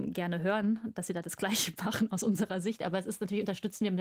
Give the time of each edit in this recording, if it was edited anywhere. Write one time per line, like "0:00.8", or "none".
none